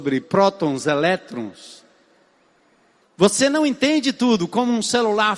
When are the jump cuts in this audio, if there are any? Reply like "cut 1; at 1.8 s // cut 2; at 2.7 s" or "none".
cut 1; at 3.0 s